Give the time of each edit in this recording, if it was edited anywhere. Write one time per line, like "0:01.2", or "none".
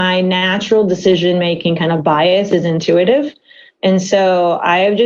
none

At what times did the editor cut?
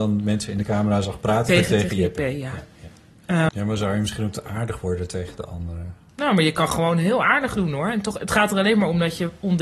0:01.5
0:03.5

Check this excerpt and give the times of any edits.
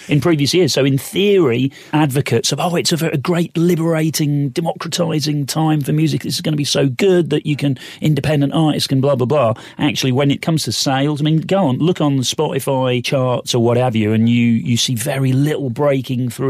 0:01.9

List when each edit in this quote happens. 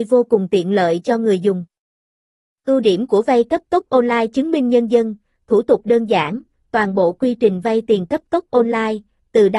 none

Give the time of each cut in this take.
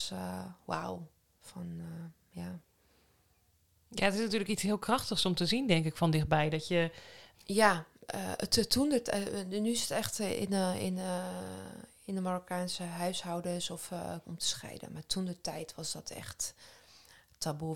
0:07.3
0:14.2

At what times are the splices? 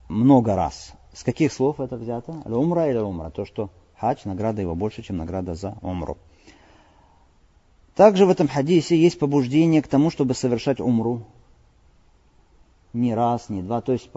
0:03.3

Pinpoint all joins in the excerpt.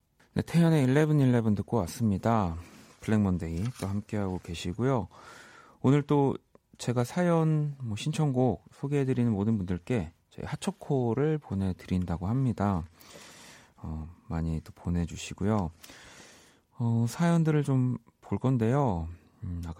none

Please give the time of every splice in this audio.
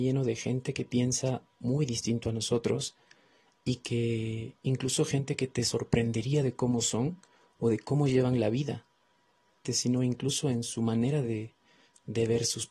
0:09.6

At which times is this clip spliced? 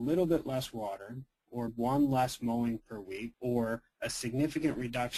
0:01.7

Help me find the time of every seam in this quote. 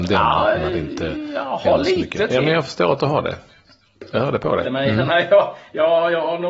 0:04.6

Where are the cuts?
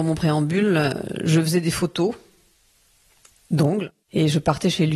0:04.0

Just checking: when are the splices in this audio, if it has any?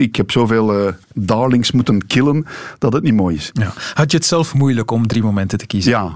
0:01.0
0:03.5

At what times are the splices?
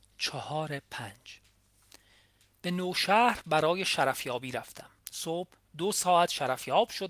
0:05.0

